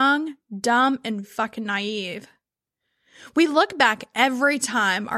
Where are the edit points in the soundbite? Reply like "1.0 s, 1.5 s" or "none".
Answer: 1.2 s